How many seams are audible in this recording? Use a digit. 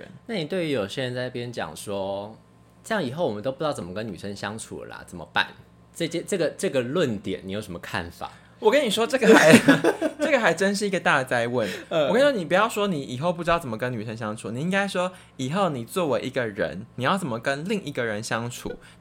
0